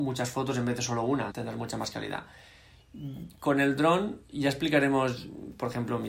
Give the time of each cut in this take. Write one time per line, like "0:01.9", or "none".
0:01.3

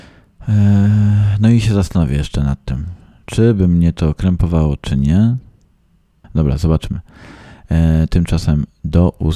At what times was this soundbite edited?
0:06.2

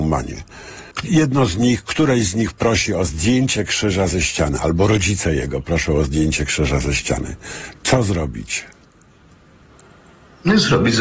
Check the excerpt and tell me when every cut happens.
0:00.9

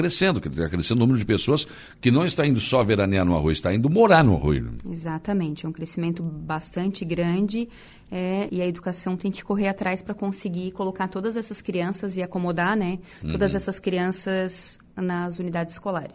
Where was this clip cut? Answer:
0:08.5

